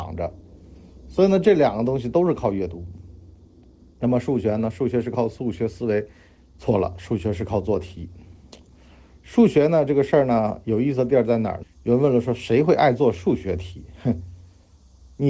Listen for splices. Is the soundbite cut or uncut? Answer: cut